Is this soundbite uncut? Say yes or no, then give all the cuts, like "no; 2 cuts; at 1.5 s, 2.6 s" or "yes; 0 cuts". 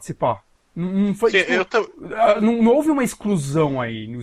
yes; 0 cuts